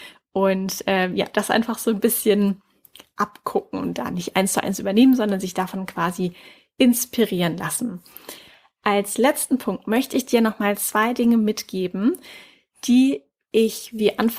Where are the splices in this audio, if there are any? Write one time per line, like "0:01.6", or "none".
none